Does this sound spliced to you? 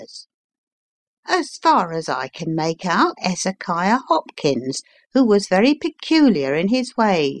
yes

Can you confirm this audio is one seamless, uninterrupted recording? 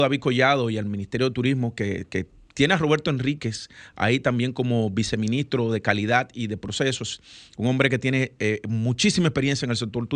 yes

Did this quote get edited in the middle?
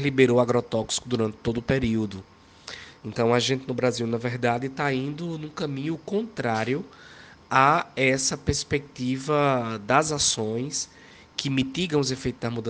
no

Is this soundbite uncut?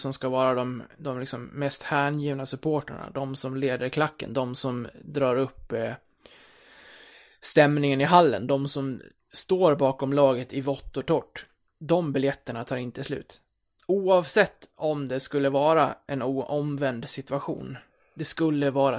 yes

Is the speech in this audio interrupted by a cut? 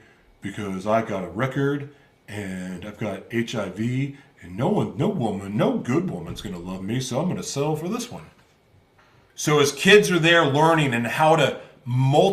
yes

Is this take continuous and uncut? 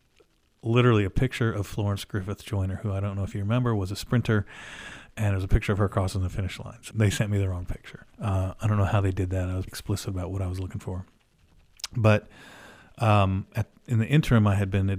no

